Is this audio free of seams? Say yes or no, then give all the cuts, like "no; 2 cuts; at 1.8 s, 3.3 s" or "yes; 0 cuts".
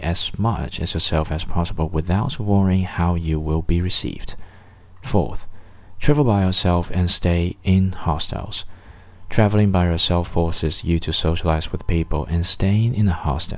yes; 0 cuts